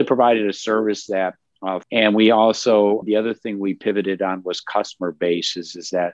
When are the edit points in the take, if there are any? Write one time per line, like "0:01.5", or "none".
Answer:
0:01.8
0:03.0